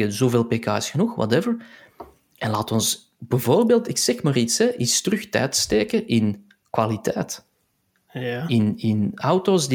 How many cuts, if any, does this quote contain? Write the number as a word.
zero